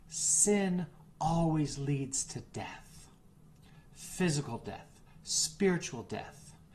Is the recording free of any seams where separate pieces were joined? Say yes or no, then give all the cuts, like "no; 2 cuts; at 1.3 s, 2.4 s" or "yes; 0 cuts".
yes; 0 cuts